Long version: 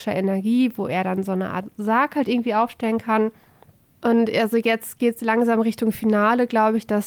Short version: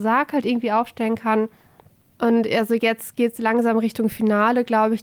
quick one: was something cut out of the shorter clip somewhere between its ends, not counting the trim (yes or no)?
no